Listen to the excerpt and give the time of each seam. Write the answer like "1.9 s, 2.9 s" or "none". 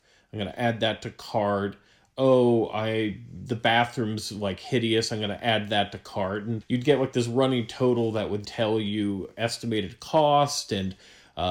6.6 s, 8.4 s